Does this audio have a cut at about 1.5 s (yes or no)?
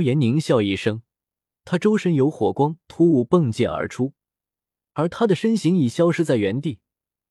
yes